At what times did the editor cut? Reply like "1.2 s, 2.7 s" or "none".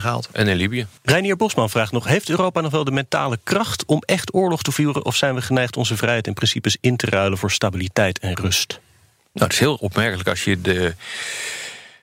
1.0 s